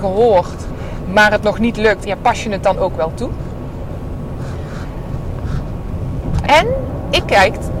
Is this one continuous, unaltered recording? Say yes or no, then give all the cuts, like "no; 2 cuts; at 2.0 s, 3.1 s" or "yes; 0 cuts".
no; 2 cuts; at 2.0 s, 6.4 s